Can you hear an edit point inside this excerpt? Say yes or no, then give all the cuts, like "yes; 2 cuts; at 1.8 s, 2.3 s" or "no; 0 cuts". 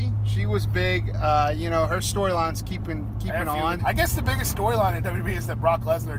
yes; 1 cut; at 3.8 s